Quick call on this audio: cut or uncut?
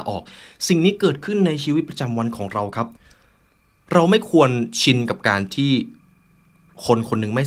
uncut